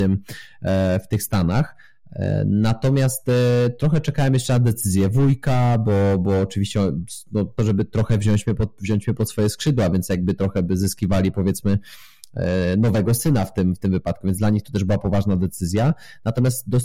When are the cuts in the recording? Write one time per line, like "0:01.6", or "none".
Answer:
0:07.6